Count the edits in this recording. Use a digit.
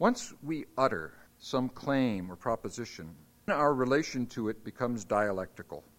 2